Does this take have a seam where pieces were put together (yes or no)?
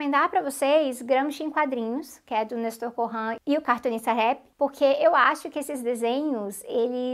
yes